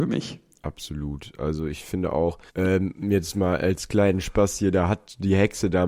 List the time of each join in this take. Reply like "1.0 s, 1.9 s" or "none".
2.5 s